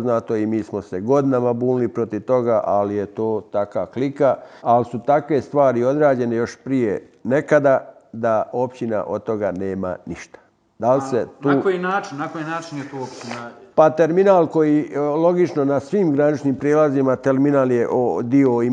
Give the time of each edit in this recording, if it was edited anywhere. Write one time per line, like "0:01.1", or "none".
0:04.6